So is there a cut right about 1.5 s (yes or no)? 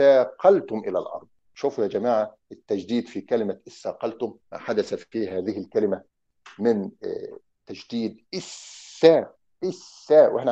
yes